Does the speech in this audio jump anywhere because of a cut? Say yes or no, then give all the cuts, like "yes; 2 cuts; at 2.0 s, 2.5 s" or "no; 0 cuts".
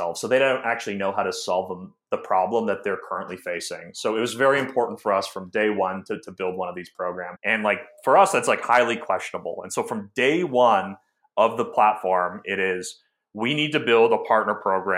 yes; 1 cut; at 7.4 s